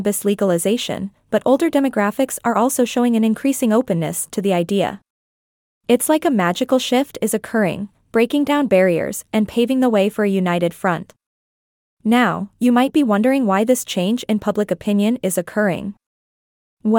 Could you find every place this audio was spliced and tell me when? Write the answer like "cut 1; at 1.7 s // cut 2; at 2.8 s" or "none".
none